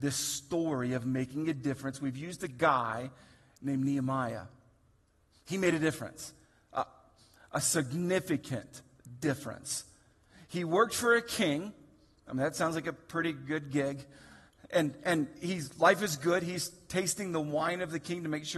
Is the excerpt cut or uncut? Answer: uncut